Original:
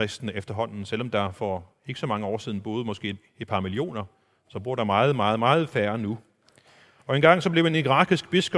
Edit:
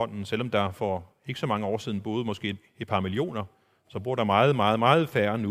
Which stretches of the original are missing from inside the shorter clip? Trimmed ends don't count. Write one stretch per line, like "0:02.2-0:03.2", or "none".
none